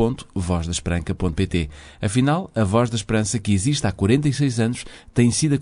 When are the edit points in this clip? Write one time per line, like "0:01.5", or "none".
none